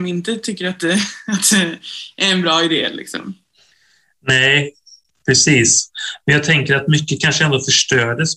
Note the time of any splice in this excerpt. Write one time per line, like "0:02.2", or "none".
none